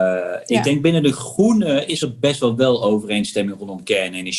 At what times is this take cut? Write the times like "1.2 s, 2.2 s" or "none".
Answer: none